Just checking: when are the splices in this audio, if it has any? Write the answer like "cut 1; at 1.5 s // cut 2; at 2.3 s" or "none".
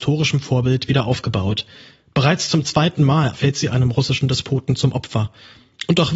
cut 1; at 3.3 s